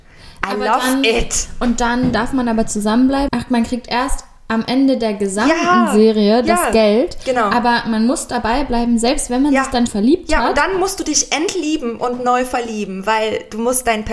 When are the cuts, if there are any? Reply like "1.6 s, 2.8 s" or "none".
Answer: 3.3 s, 9.9 s